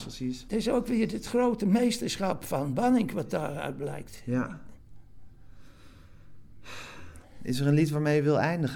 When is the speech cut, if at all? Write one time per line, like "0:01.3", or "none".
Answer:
none